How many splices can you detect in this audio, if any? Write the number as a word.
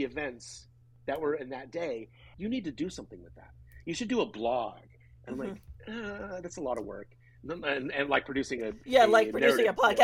one